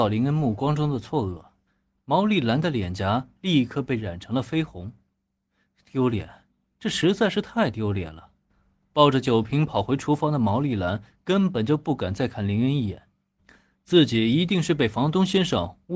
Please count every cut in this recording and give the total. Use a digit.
0